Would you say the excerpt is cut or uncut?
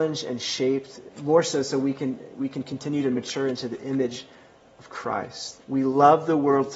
cut